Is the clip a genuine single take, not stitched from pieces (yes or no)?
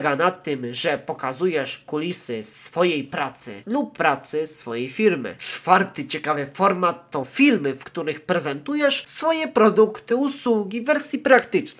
yes